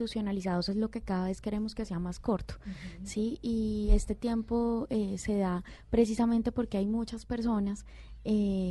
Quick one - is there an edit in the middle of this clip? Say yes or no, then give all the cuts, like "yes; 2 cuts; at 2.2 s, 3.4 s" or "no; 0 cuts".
no; 0 cuts